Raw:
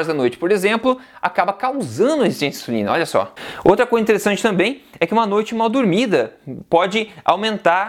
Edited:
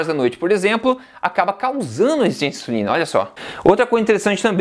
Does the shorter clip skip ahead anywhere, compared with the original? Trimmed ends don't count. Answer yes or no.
no